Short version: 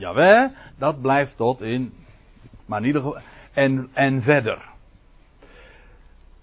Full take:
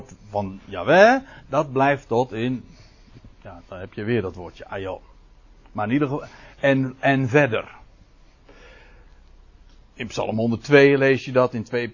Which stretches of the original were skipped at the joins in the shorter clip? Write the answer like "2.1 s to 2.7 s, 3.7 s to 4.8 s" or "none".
3.3 s to 5.7 s